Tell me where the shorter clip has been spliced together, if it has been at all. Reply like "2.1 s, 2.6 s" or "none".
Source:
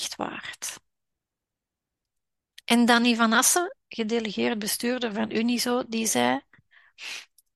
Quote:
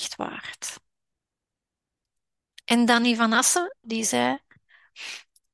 3.8 s